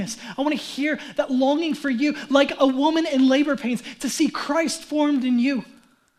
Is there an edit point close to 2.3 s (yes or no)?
no